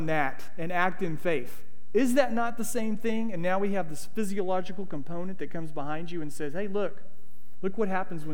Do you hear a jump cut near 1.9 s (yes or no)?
no